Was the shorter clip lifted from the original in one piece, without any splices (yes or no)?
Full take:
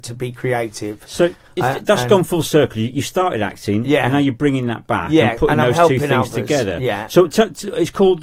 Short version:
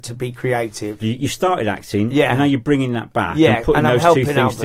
no